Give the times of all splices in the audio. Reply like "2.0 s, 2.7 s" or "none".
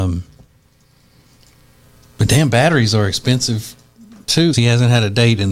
4.5 s